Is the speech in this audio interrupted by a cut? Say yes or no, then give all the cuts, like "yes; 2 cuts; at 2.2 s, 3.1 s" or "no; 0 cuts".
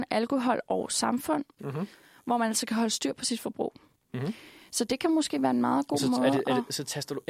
yes; 1 cut; at 1.6 s